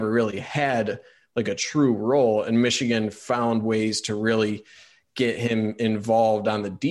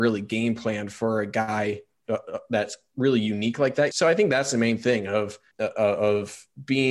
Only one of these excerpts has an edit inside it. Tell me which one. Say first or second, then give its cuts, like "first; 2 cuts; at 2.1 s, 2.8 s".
second; 2 cuts; at 3.9 s, 5.5 s